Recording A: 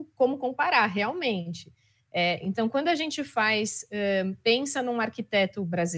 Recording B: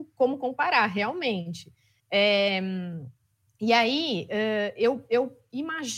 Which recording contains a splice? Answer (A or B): B